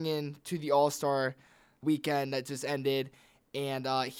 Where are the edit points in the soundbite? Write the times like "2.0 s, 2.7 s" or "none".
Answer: 1.8 s